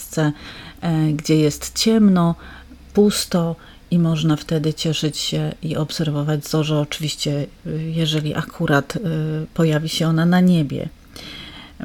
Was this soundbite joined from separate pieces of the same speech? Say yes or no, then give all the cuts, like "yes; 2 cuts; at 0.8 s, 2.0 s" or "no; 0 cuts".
no; 0 cuts